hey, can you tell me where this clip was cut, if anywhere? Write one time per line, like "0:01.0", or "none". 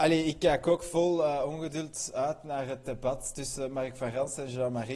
none